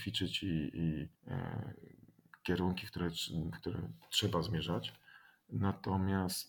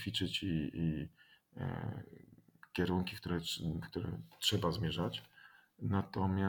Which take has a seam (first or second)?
first